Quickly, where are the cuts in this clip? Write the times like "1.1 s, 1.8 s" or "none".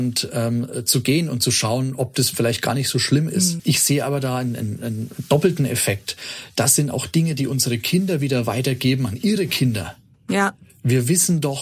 3.6 s